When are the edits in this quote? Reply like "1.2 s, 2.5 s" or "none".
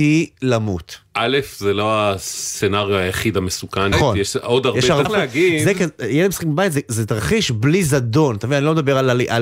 3.9 s, 5.0 s